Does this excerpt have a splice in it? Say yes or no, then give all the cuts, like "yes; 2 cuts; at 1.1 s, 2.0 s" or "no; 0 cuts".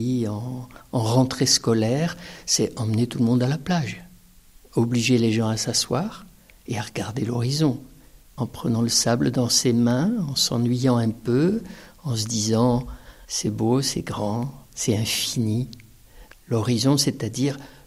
yes; 1 cut; at 16.3 s